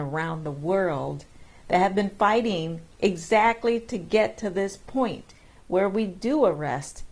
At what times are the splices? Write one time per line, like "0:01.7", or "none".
0:02.9

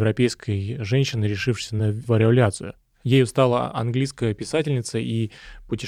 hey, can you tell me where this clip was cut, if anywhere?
none

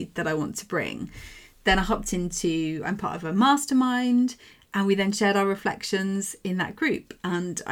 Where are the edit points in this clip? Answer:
none

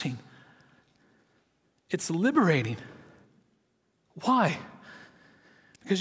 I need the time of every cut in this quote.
none

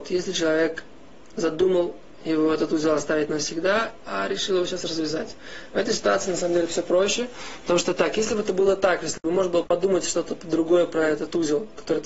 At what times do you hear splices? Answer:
0:04.1
0:09.6

